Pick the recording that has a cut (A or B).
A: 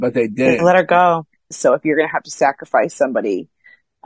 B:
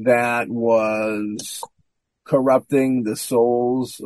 A